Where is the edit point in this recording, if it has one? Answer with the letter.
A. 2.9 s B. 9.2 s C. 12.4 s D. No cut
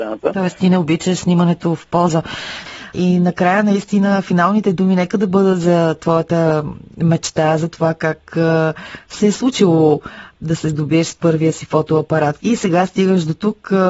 C